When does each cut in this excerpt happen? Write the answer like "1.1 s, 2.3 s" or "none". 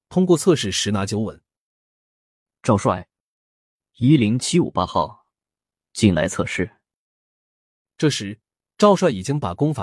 none